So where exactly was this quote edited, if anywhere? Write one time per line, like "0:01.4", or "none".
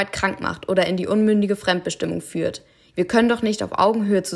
0:02.9